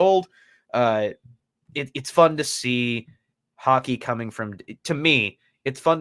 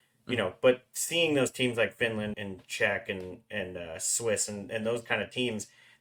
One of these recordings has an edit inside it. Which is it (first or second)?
second